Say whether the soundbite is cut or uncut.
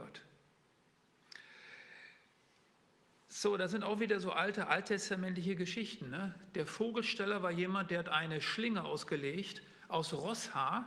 uncut